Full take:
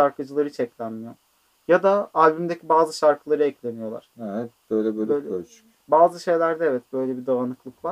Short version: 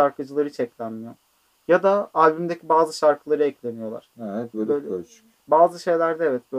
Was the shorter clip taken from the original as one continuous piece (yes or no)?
no